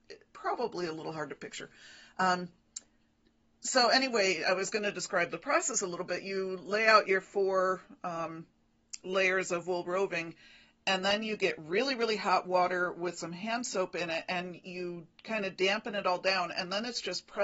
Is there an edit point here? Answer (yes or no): no